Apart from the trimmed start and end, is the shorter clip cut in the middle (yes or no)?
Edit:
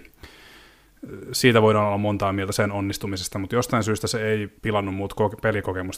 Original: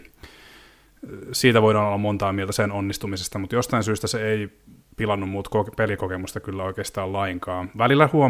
yes